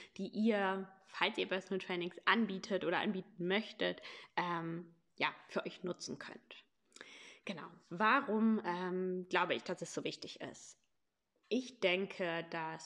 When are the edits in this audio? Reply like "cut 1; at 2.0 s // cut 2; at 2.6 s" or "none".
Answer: none